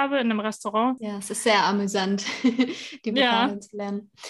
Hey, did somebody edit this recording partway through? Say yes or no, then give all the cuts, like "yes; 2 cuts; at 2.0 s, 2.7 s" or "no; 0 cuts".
yes; 1 cut; at 1.0 s